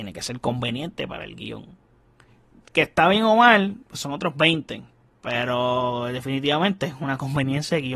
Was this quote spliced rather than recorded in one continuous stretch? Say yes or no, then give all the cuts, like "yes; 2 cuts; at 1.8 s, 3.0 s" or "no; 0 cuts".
no; 0 cuts